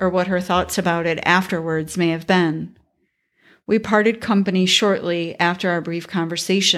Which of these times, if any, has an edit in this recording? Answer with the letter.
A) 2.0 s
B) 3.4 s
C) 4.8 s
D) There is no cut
D